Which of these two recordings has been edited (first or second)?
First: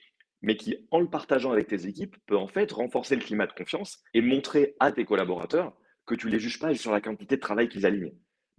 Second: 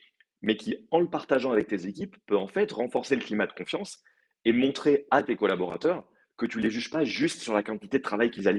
first